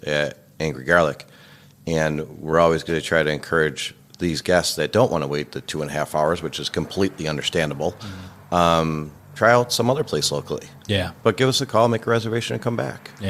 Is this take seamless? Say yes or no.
yes